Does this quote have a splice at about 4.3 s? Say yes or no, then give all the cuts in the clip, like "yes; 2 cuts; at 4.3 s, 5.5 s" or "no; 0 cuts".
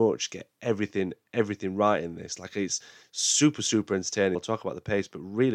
yes; 1 cut; at 4.3 s